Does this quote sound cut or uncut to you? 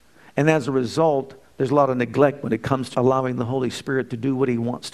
cut